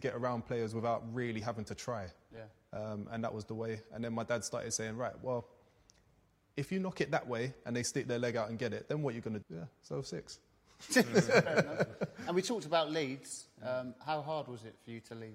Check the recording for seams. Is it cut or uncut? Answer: cut